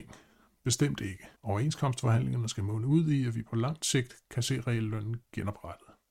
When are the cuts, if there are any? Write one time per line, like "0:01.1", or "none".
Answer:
0:01.4